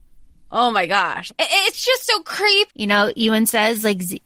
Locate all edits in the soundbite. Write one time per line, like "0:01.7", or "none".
0:01.3
0:02.7